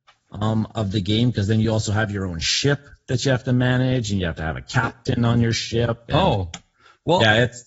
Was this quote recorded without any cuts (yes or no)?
yes